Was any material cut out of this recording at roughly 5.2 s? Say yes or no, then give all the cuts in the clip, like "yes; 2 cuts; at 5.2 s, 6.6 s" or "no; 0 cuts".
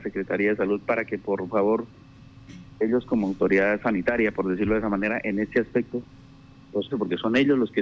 no; 1 cut; at 6.9 s